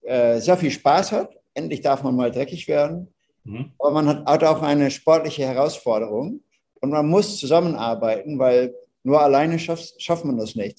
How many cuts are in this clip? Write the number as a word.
zero